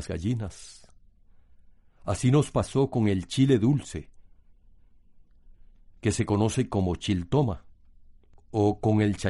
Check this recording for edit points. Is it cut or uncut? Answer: uncut